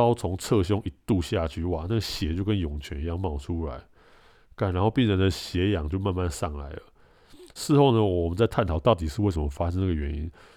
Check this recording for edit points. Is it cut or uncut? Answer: uncut